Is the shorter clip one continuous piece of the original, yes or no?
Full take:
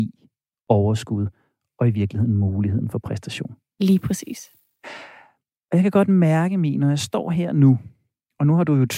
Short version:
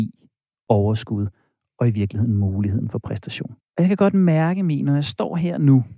no